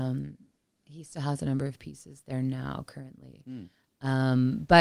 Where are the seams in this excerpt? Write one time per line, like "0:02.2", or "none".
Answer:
none